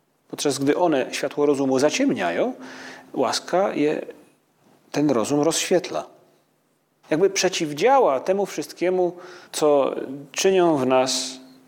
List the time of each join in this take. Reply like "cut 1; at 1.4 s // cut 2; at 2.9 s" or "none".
cut 1; at 7.0 s // cut 2; at 9.5 s

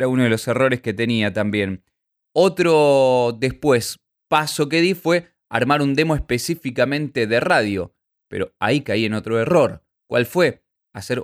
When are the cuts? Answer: none

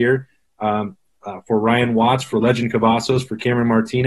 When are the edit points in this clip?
none

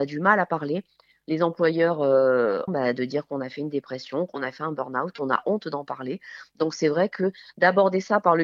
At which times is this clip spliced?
cut 1; at 2.7 s

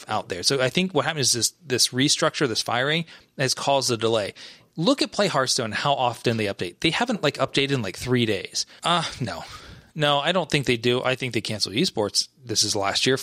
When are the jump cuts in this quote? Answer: cut 1; at 8.8 s

